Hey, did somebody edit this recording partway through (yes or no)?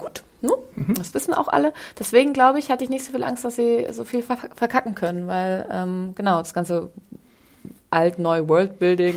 no